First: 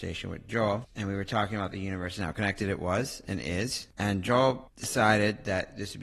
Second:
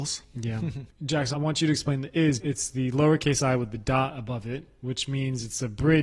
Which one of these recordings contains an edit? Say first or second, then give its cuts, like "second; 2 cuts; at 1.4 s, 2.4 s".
second; 2 cuts; at 1.3 s, 2.4 s